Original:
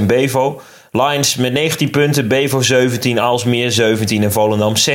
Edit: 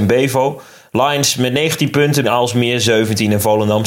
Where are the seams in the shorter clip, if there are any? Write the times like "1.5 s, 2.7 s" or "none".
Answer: 2.2 s